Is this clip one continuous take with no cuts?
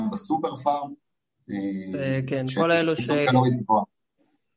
yes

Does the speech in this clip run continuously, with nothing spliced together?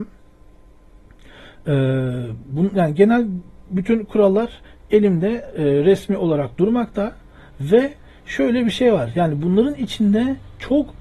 yes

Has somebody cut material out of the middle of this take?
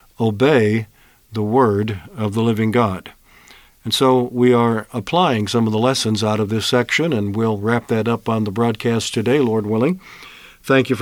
no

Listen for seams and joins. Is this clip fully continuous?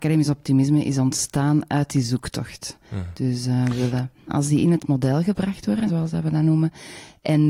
no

